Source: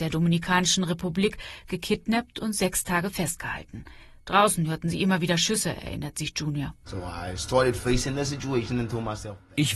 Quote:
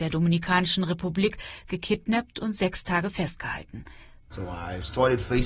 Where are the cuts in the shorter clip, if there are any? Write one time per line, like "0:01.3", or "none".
0:04.2